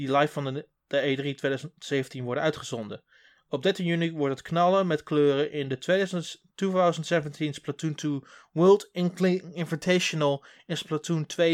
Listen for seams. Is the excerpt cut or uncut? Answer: uncut